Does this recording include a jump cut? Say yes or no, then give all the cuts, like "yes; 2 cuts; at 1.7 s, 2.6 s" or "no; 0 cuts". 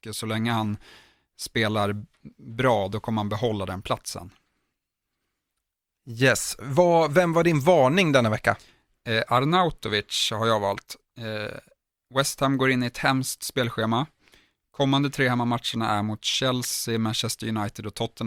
no; 0 cuts